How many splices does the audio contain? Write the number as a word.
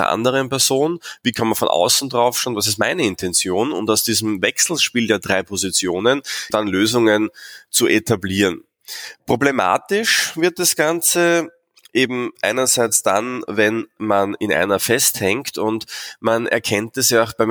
one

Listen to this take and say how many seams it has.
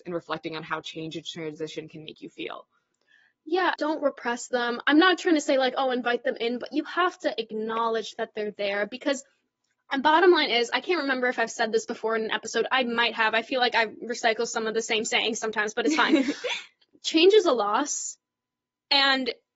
one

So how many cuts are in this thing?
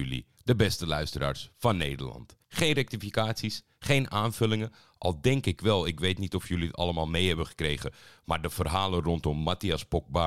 one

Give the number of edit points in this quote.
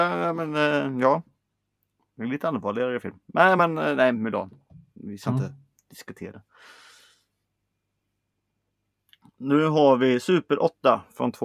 zero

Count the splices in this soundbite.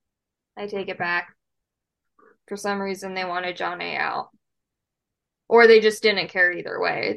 zero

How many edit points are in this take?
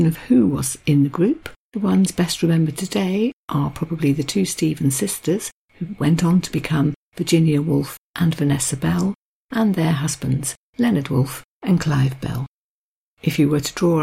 zero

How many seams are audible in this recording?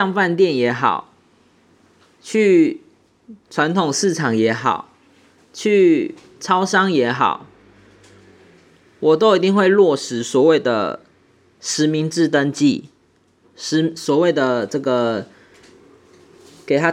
zero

